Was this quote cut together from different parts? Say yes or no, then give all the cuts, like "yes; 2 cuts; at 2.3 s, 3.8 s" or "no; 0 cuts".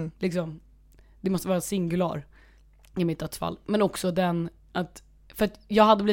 no; 0 cuts